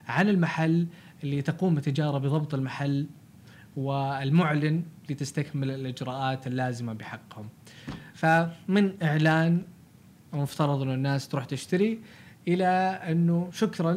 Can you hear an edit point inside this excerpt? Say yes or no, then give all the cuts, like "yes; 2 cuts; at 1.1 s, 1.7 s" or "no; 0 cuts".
no; 0 cuts